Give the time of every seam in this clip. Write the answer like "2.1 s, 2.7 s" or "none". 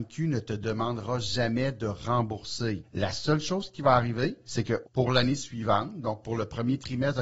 4.8 s